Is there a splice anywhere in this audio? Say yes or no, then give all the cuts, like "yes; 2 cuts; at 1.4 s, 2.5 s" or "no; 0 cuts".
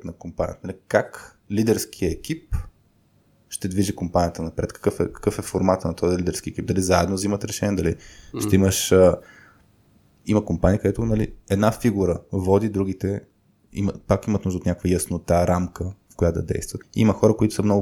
yes; 1 cut; at 16.8 s